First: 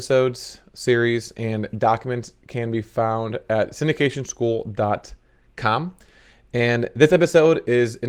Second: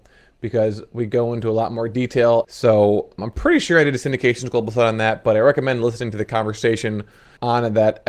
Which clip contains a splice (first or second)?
second